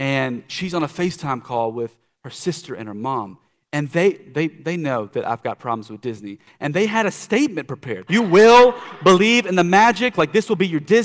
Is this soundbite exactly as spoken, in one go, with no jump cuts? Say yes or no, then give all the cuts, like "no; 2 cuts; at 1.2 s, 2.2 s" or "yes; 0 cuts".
no; 1 cut; at 8.1 s